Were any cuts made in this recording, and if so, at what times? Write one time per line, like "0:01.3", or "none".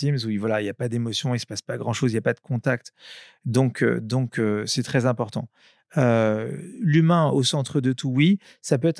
none